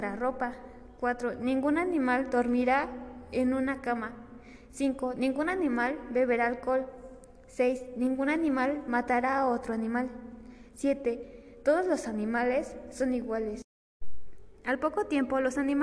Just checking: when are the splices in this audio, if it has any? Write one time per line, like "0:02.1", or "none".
none